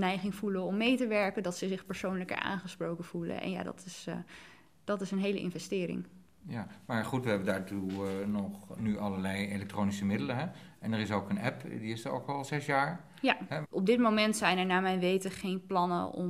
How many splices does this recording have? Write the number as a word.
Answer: one